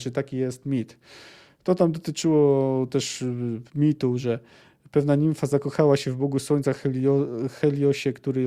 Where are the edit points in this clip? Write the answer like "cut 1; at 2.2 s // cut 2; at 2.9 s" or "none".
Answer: cut 1; at 3.7 s